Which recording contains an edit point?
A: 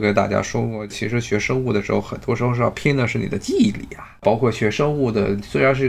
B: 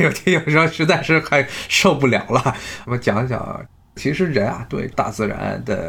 B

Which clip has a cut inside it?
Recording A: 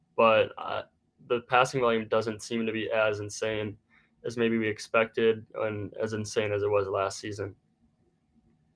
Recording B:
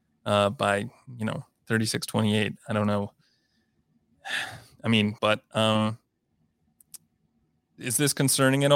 B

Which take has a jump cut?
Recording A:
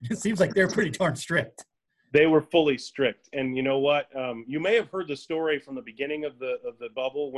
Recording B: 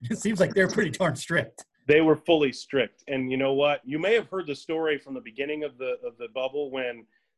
B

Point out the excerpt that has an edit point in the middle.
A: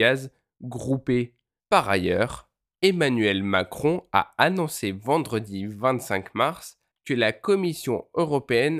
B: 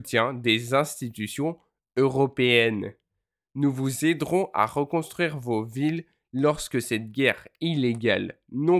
A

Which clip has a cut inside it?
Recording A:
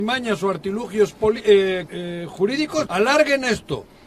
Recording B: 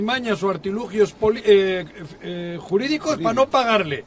A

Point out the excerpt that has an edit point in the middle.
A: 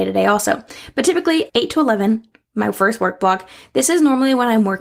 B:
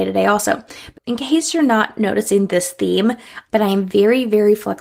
B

